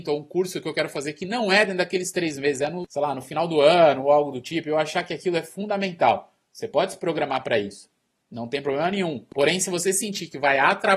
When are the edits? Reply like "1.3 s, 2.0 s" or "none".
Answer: none